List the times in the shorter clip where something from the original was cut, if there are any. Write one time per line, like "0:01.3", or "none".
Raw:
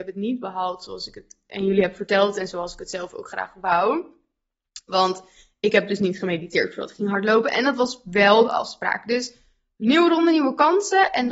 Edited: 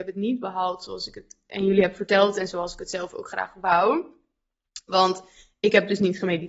none